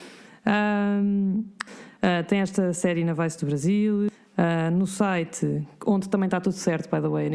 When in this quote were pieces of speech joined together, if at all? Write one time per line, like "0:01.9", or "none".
0:01.7